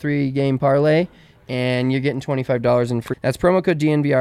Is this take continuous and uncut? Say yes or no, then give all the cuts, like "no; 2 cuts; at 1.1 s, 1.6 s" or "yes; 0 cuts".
no; 1 cut; at 3.1 s